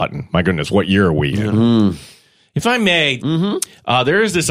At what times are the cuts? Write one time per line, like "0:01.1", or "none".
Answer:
0:01.5
0:03.2